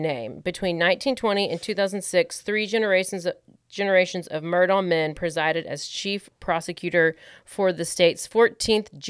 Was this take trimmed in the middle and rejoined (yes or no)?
no